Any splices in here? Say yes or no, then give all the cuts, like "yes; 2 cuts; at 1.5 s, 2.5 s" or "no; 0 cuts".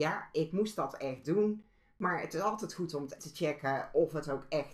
yes; 1 cut; at 3.2 s